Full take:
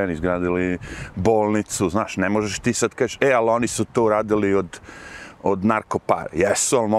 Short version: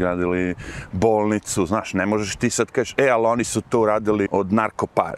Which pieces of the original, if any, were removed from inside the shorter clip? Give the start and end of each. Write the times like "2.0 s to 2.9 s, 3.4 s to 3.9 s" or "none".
4.5 s to 5.4 s